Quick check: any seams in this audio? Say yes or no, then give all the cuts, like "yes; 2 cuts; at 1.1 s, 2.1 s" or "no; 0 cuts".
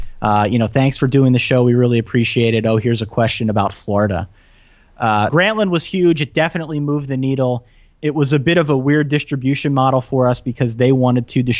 yes; 1 cut; at 5.3 s